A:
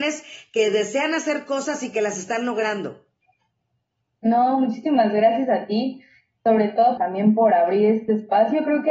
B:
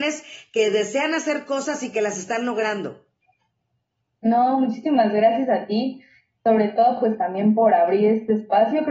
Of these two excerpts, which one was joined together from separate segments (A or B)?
A